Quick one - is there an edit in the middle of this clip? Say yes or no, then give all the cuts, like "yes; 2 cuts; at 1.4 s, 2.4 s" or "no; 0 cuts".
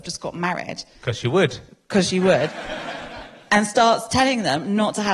no; 0 cuts